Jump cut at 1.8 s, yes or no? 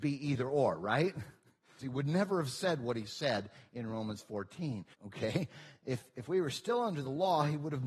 yes